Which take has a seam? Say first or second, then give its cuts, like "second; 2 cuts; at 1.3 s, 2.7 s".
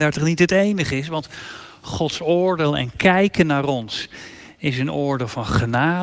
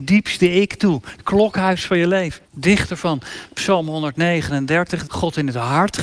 second; 2 cuts; at 2.5 s, 5.1 s